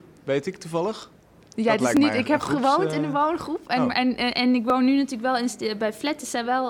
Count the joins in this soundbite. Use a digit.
0